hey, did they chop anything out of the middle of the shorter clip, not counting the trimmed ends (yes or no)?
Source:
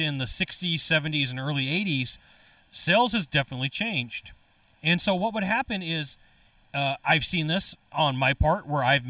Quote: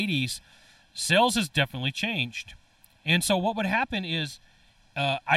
no